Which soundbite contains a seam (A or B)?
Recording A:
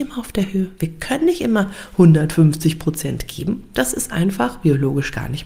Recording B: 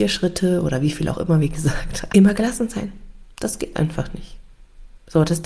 B